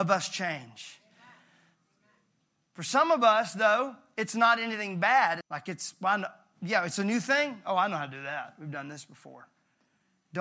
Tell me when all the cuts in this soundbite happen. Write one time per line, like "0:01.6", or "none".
0:05.4